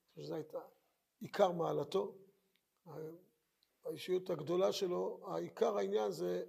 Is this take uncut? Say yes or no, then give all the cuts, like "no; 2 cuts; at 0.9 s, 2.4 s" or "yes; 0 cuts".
yes; 0 cuts